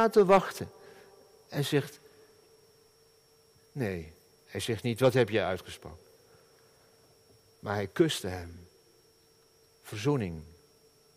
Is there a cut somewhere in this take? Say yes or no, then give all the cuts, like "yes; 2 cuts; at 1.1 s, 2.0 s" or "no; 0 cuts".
no; 0 cuts